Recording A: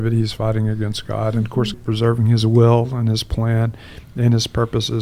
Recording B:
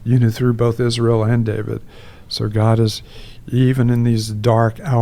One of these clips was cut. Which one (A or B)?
A